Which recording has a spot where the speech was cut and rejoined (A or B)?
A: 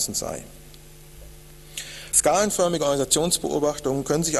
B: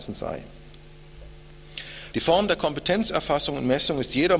B